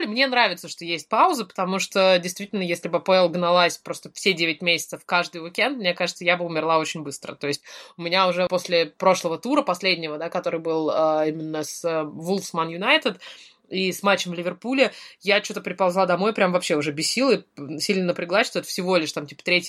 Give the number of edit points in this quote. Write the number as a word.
one